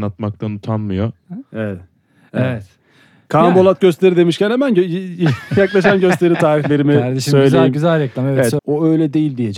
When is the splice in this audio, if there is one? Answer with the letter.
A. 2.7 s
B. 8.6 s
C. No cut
B